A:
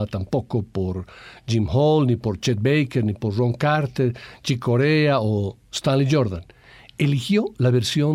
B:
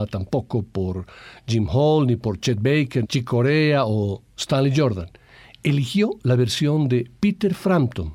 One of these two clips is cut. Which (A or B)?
B